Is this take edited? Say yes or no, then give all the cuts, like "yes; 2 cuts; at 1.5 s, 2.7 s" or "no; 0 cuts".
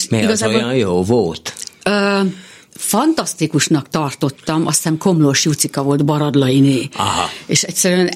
no; 0 cuts